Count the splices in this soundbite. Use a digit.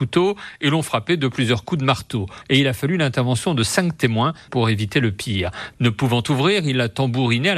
2